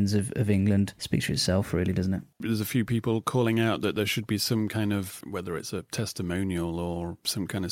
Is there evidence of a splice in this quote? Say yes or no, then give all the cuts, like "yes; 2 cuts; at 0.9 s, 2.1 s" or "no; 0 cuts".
yes; 2 cuts; at 2.3 s, 5.2 s